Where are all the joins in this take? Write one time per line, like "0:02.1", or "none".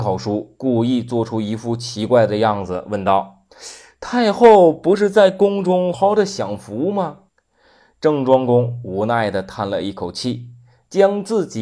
0:05.9
0:07.3

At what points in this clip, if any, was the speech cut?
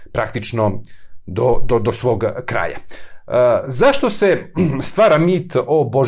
none

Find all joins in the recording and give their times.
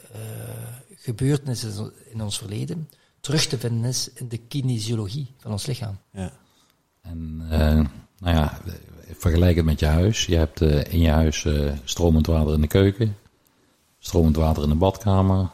0:06.0

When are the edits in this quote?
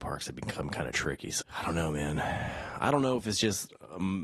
0:01.4

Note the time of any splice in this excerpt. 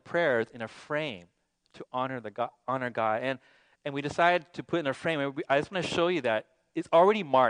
none

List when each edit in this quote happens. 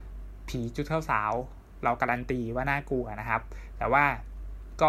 none

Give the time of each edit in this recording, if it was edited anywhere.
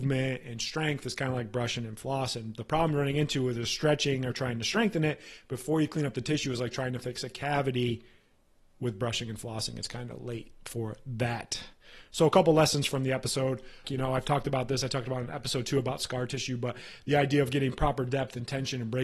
0:13.8

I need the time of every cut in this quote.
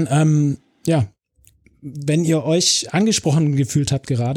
none

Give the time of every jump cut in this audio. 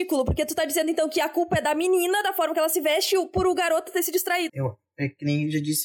0:04.5

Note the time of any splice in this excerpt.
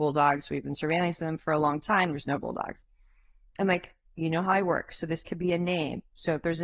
none

